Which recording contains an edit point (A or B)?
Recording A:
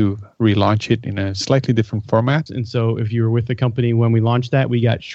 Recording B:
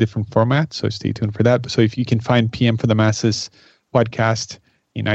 A